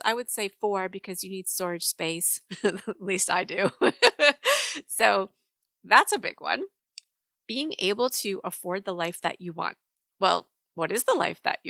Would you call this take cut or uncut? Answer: uncut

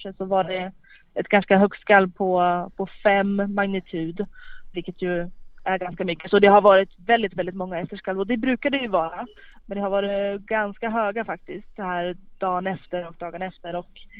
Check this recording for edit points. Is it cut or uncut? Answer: cut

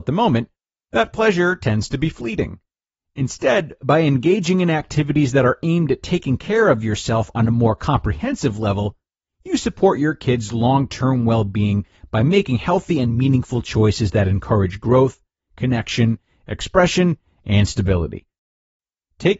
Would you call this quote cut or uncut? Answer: uncut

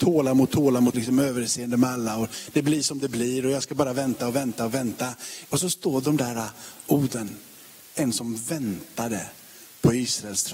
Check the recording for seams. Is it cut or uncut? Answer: cut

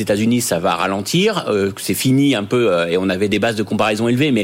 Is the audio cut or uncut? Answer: uncut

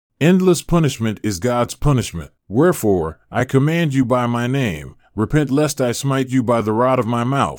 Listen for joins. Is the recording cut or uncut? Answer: cut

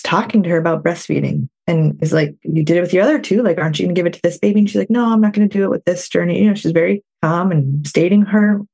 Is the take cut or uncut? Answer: cut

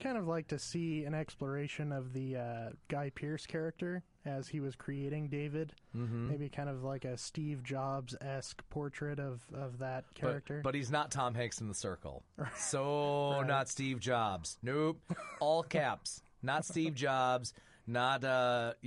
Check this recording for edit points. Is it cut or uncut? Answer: uncut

